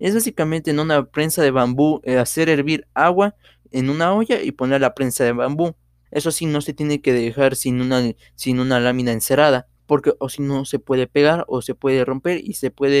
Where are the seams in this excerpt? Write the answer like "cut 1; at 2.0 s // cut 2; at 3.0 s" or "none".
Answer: cut 1; at 6.1 s // cut 2; at 9.8 s